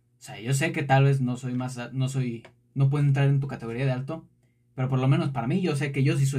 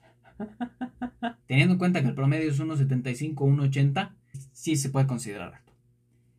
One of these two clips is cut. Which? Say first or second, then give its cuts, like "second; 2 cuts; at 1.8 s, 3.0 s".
second; 2 cuts; at 1.4 s, 4.3 s